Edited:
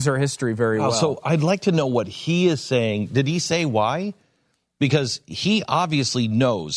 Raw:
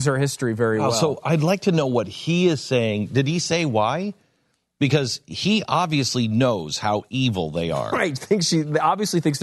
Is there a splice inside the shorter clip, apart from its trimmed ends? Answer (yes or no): no